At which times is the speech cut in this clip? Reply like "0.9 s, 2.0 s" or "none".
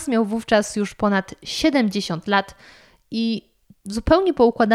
none

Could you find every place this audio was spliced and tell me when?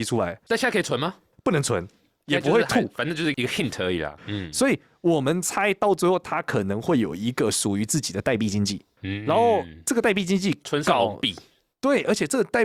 4.2 s

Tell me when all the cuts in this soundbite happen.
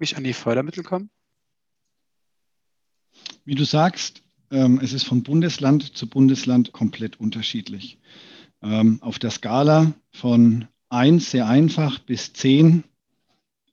6.7 s

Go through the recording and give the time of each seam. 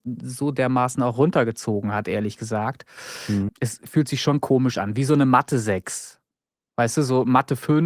3.5 s

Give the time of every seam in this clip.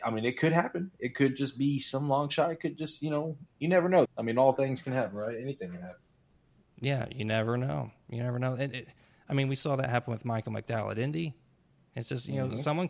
4.1 s

